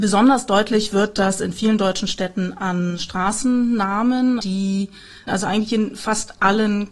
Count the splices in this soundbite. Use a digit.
1